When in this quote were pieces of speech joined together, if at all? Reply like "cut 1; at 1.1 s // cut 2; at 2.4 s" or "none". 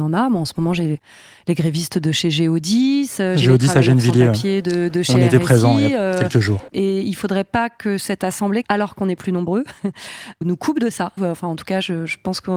cut 1; at 6.7 s // cut 2; at 8.6 s // cut 3; at 11.2 s